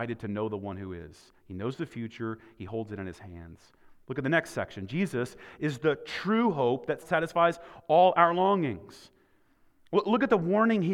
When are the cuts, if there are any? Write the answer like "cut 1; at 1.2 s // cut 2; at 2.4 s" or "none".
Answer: cut 1; at 7.0 s